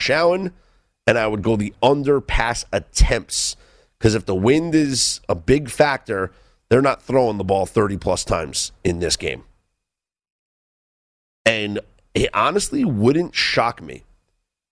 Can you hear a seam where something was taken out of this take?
no; 0 cuts

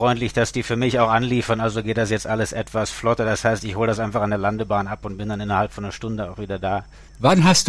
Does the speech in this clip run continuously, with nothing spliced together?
yes; 0 cuts

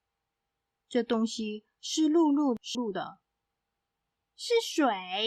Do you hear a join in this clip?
yes; 1 cut; at 2.7 s

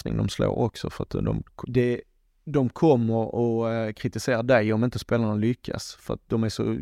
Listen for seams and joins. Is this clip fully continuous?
no; 1 cut; at 1.6 s

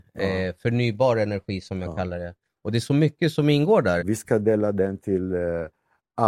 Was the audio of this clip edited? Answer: yes; 1 cut; at 4.0 s

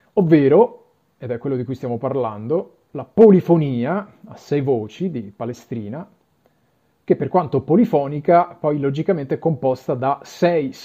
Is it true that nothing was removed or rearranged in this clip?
yes; 0 cuts

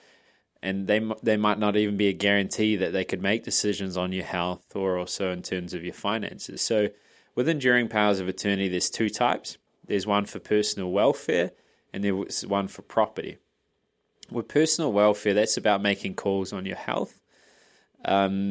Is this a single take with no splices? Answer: no; 1 cut; at 6.6 s

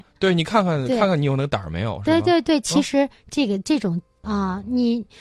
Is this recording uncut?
no; 1 cut; at 4.2 s

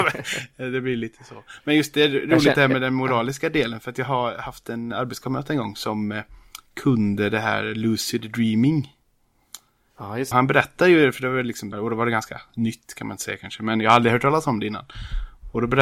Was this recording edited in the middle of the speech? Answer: yes; 2 cuts; at 10.3 s, 11.7 s

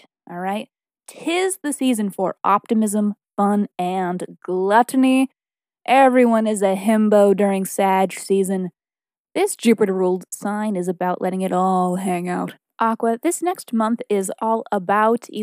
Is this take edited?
no; 0 cuts

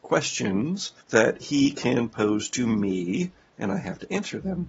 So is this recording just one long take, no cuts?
no; 1 cut; at 1.0 s

